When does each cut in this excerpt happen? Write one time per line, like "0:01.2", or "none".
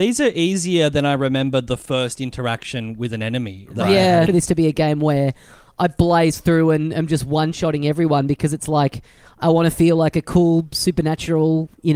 0:04.3